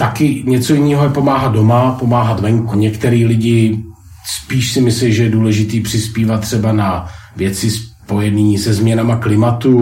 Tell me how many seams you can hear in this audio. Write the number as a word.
one